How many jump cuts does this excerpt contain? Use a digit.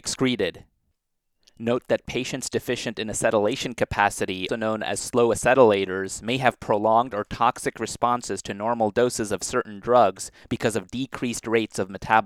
1